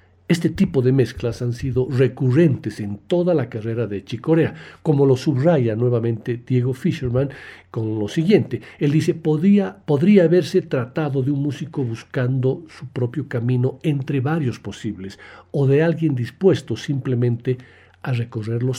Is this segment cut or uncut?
uncut